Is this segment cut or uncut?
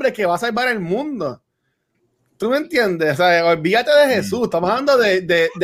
uncut